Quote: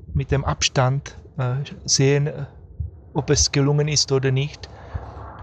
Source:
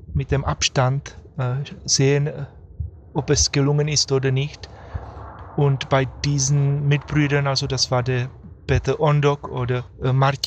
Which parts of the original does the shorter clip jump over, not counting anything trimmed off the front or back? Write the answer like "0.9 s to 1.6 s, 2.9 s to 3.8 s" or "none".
none